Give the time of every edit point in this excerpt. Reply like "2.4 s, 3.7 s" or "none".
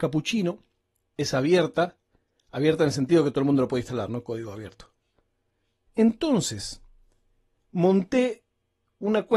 1.2 s, 5.8 s